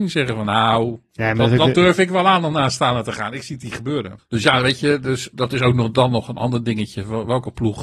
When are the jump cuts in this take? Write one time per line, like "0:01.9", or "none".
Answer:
0:04.2
0:05.3